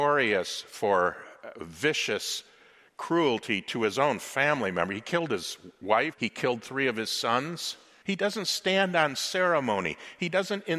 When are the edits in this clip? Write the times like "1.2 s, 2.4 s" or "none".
6.1 s, 8.0 s

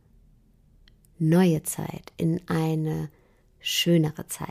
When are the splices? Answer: none

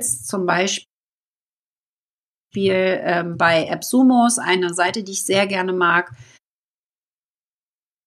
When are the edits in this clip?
none

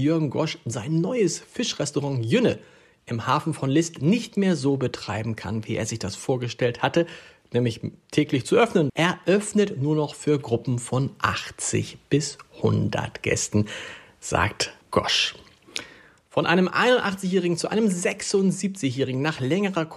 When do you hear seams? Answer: 8.9 s, 14.8 s

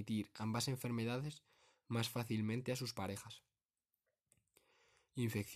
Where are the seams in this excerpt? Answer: none

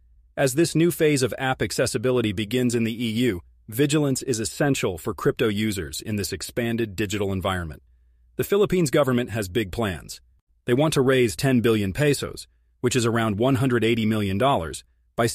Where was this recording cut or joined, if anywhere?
none

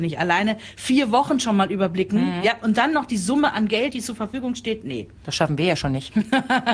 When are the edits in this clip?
none

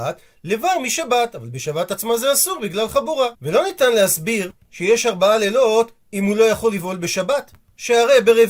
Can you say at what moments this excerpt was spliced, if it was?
3.3 s

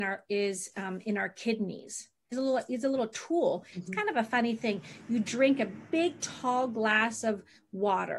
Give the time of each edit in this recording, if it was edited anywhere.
2.3 s, 3.7 s

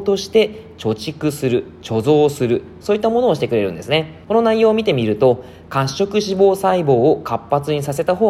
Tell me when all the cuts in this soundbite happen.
4.2 s

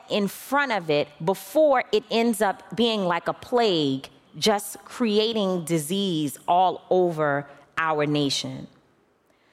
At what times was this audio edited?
4.3 s

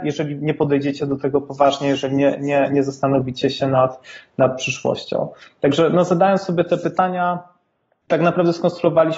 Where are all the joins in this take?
none

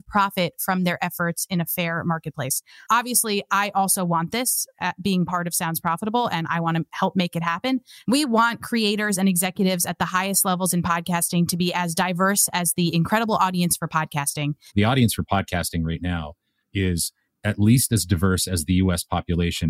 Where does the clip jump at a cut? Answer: 8.0 s, 14.7 s

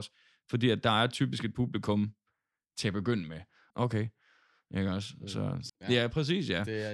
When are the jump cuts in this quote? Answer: 3.7 s, 5.7 s

